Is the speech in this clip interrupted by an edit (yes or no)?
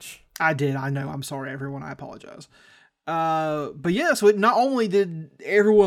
no